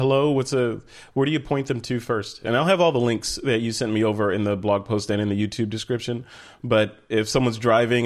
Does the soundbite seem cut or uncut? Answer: uncut